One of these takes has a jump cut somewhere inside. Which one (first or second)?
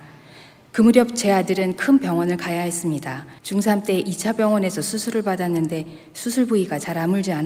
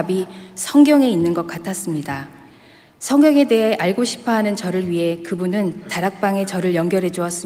first